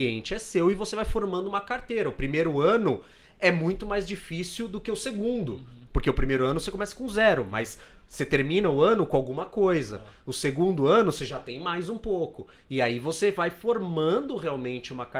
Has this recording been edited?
no; 0 cuts

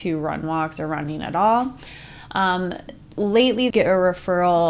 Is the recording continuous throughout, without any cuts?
no; 1 cut; at 3.7 s

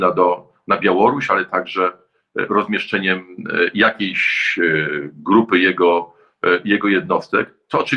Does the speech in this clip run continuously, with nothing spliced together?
yes; 0 cuts

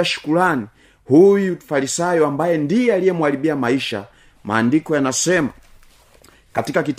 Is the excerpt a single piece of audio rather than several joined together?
yes; 0 cuts

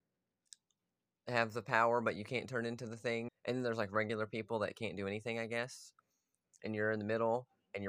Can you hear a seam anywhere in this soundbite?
yes; 1 cut; at 3.3 s

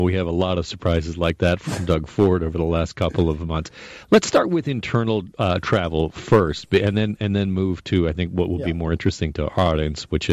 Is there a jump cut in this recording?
no; 0 cuts

